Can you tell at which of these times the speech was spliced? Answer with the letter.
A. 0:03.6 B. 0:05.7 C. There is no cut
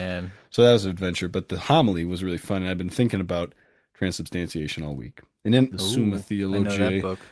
B